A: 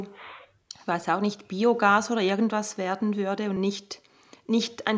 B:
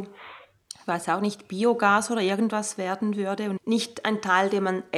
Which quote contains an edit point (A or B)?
B